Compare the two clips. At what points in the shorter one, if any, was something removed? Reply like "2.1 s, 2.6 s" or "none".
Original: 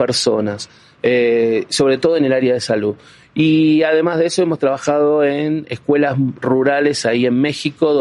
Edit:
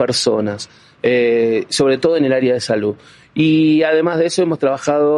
none